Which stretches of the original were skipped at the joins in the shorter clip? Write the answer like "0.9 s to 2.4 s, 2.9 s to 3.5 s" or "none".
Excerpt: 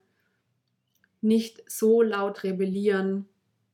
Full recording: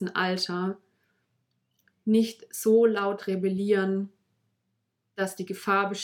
none